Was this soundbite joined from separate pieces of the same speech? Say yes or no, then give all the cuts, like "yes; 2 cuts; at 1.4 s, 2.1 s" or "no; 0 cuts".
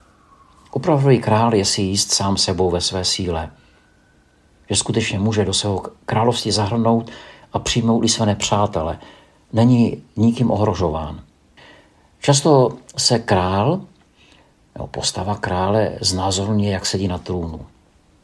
no; 0 cuts